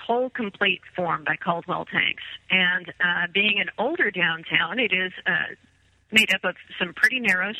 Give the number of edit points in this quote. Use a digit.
0